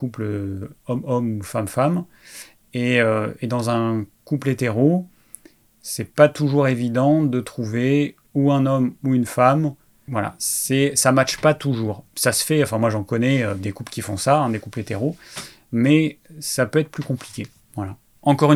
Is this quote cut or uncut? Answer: uncut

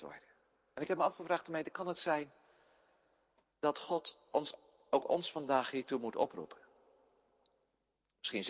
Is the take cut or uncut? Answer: uncut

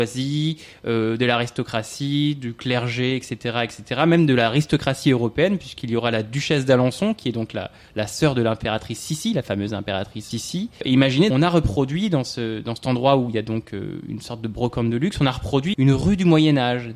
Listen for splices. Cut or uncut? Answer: cut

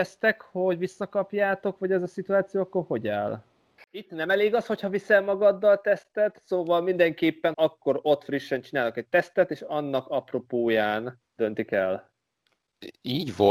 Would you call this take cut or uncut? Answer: cut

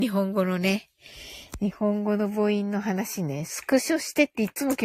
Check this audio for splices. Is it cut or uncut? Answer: uncut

